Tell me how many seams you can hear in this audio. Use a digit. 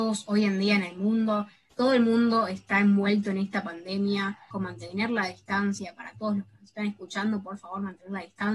2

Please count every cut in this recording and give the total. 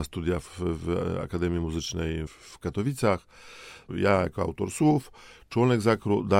2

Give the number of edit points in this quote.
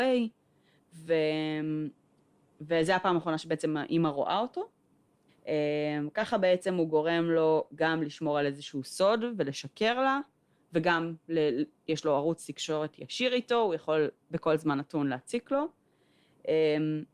1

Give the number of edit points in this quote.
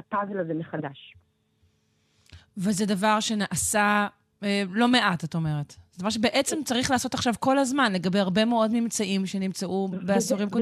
0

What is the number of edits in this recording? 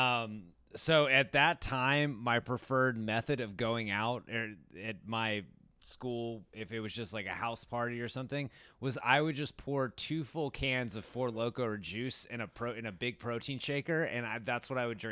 0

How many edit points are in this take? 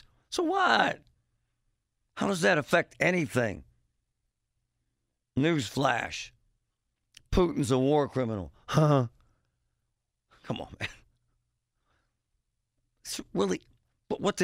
0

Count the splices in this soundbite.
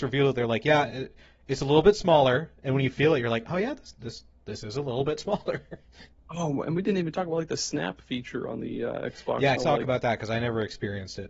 1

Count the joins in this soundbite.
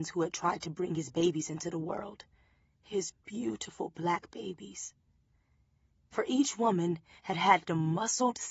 0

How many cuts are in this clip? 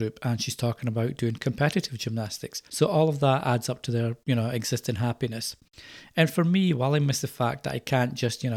1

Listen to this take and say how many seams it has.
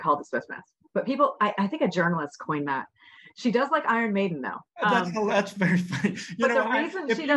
0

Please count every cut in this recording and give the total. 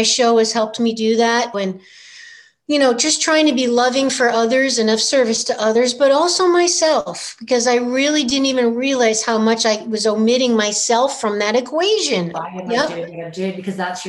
2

